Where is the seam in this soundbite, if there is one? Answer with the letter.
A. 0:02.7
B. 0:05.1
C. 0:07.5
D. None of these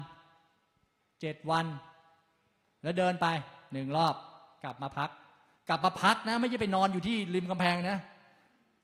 D